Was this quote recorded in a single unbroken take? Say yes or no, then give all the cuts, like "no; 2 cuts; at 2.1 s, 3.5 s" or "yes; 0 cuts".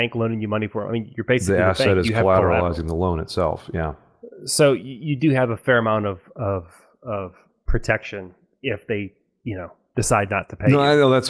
yes; 0 cuts